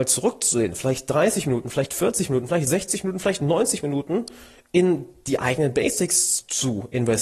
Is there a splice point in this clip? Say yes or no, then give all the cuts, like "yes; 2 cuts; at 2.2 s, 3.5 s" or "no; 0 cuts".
no; 0 cuts